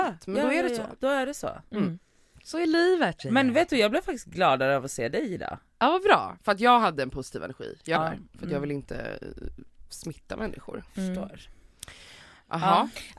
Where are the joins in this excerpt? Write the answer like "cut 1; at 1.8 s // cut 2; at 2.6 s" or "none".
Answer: cut 1; at 8.0 s